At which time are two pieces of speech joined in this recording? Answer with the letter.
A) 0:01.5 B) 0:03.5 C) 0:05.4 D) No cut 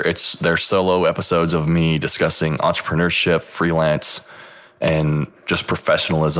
D